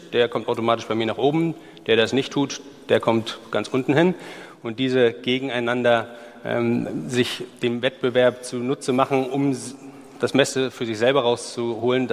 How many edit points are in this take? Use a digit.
0